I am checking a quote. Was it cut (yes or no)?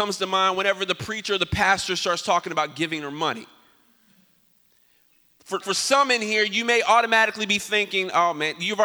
yes